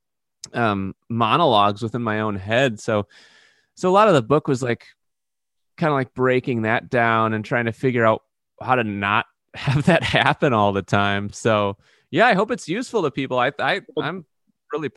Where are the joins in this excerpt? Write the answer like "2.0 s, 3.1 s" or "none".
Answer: none